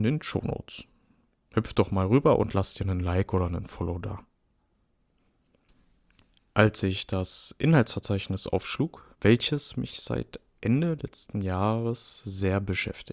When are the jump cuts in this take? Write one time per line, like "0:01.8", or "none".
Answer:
0:09.1